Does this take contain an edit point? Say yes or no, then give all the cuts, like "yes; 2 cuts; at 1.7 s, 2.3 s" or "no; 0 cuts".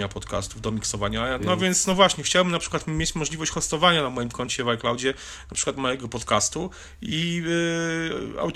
yes; 1 cut; at 1.4 s